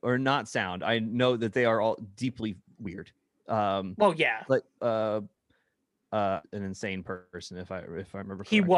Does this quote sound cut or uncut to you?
cut